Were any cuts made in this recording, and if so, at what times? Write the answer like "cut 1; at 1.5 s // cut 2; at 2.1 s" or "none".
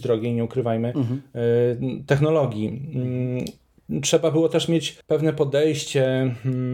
none